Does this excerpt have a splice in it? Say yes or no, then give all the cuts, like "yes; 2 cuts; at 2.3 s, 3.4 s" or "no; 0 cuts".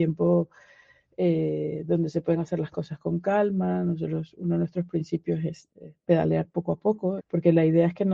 yes; 2 cuts; at 5.7 s, 7.2 s